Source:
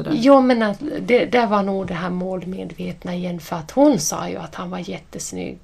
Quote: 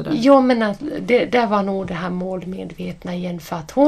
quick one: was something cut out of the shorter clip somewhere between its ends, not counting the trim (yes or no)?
no